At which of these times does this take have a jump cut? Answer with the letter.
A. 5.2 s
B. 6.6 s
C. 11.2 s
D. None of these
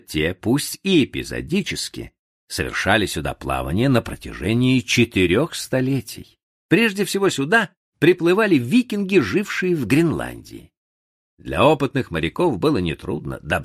B